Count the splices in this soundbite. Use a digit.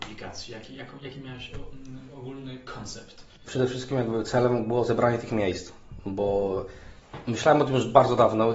0